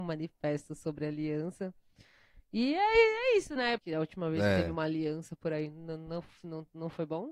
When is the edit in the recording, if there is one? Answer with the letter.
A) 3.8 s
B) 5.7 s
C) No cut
A